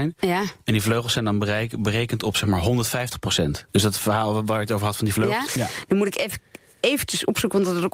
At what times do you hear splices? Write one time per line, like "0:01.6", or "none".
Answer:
0:03.7
0:05.5